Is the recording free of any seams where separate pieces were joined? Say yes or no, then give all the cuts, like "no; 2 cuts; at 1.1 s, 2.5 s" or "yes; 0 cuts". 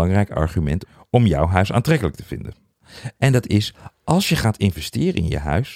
no; 1 cut; at 3.2 s